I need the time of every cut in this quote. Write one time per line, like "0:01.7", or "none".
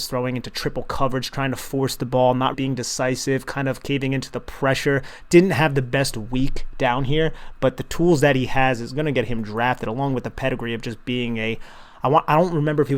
0:02.5